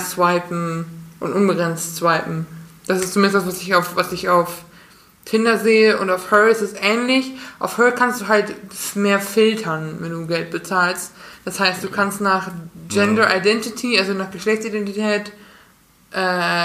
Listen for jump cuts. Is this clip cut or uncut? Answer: uncut